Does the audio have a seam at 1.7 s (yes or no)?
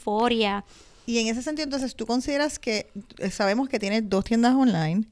no